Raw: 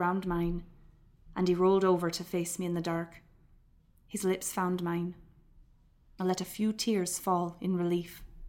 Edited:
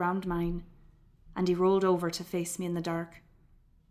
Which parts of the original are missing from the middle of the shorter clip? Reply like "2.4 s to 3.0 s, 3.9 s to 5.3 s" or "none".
none

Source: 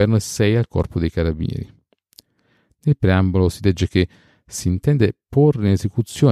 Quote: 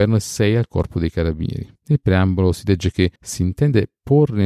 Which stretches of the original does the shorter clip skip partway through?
1.8 s to 2.7 s, 4.1 s to 4.4 s

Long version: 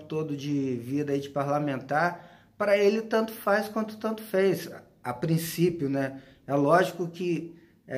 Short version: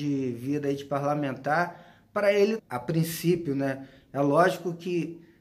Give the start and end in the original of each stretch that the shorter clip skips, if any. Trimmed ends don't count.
3.0 s to 4.9 s

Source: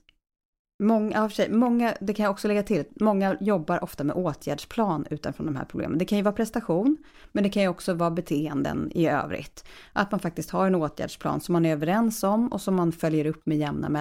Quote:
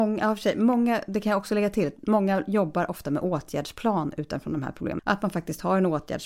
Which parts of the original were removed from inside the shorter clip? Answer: 5.9 s to 9.9 s

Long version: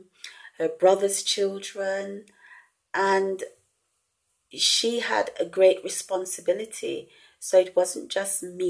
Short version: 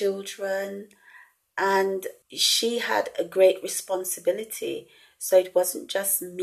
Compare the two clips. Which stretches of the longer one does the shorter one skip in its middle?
3.6 s to 4.4 s

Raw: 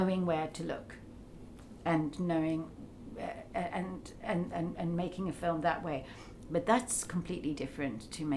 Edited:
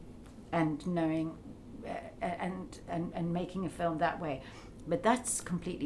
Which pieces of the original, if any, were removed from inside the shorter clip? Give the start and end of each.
4.2 s to 4.5 s

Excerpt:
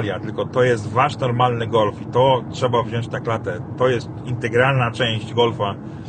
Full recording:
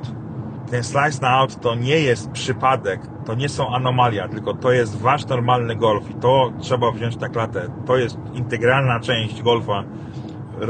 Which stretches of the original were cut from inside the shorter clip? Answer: none

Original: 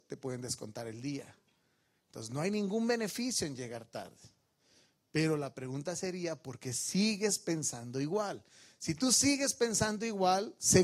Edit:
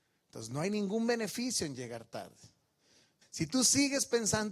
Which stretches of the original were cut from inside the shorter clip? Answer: 5.0 s to 8.7 s

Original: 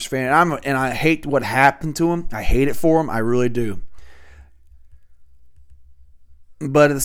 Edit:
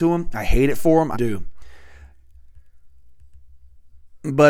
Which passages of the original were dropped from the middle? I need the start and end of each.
3.1 s to 3.5 s

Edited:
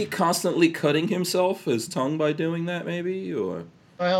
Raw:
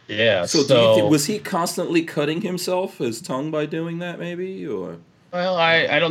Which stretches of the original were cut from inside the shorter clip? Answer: none

